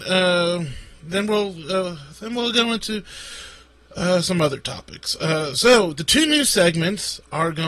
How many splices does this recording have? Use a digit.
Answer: 0